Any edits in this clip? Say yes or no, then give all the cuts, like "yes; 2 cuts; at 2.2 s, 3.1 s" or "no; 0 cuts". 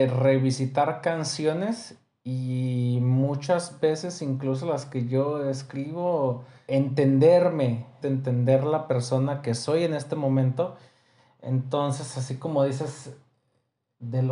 yes; 2 cuts; at 6.7 s, 8.0 s